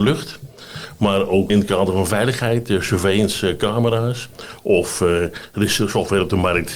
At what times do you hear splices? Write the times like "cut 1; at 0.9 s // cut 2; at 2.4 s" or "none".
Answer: cut 1; at 1.5 s